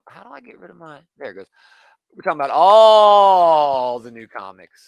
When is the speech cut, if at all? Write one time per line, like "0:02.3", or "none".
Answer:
0:01.1